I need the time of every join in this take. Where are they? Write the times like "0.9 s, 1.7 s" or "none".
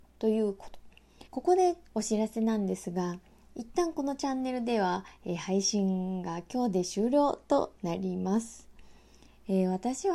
1.3 s